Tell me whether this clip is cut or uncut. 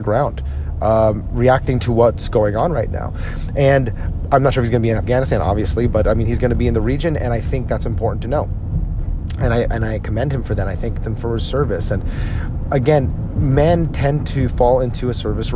uncut